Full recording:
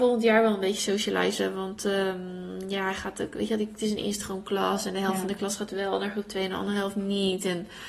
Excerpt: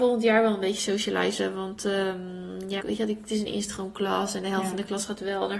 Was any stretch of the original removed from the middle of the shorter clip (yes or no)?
yes